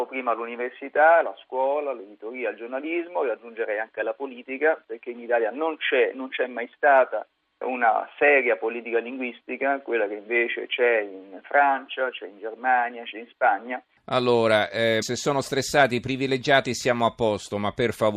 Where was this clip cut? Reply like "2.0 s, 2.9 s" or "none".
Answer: 7.6 s, 14.0 s, 15.0 s